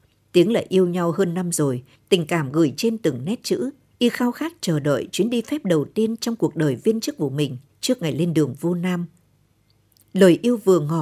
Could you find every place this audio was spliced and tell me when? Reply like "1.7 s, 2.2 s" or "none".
1.9 s, 3.9 s, 7.7 s